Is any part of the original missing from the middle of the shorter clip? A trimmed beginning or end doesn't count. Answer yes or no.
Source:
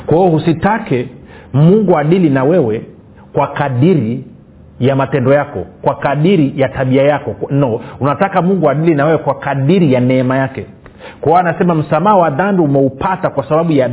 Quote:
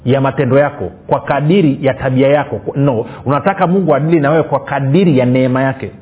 no